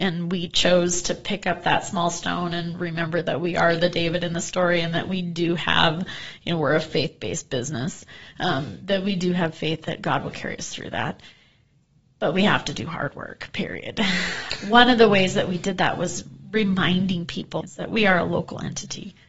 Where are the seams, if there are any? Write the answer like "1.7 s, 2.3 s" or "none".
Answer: 17.6 s

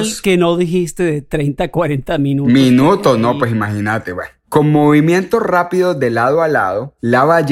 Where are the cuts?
none

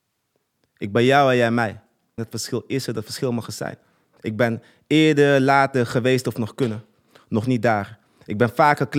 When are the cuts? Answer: 2.2 s, 4.2 s

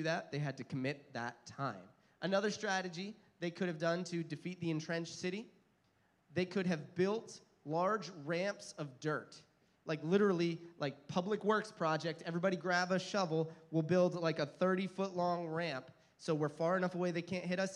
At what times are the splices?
none

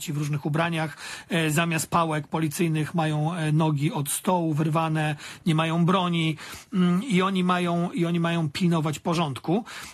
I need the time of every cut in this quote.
none

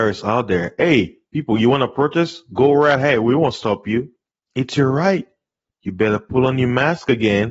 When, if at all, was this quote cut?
5.7 s

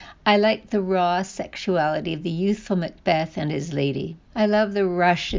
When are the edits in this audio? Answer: 4.3 s

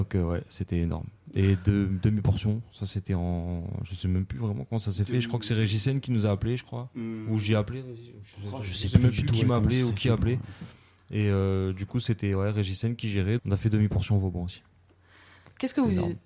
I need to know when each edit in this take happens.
13.4 s

